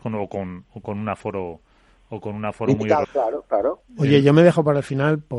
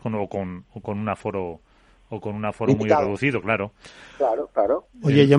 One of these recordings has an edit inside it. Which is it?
first; 1 cut; at 3.0 s

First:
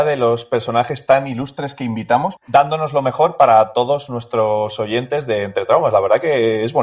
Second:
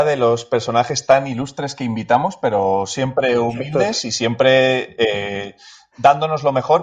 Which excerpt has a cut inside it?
first; 1 cut; at 2.4 s

